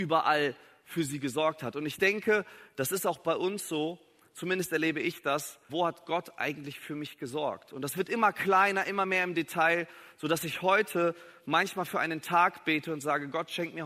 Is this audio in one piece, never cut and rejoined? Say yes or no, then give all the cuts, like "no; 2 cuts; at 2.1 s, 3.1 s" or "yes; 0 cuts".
no; 1 cut; at 5.7 s